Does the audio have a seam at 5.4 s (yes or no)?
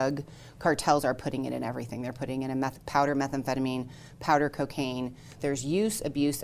yes